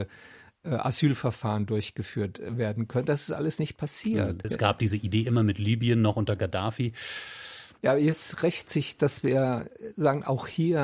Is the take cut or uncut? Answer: cut